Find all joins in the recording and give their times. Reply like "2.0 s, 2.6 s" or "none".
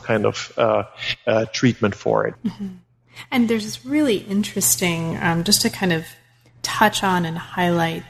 2.3 s